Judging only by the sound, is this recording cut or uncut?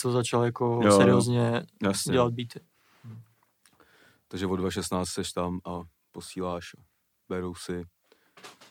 uncut